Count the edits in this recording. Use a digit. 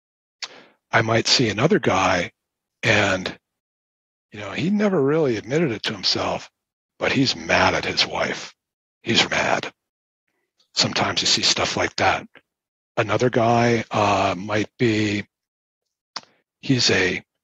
1